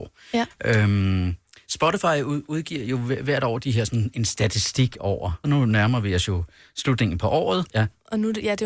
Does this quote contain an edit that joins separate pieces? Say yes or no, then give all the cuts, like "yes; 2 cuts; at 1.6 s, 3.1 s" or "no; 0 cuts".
yes; 2 cuts; at 5.4 s, 7.7 s